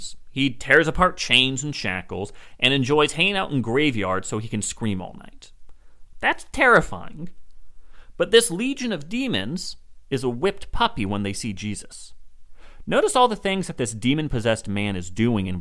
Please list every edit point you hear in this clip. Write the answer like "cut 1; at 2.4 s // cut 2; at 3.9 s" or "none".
cut 1; at 6.1 s